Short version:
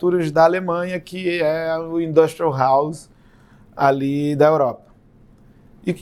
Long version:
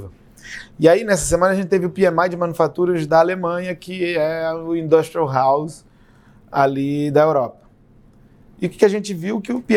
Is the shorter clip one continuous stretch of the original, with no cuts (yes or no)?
yes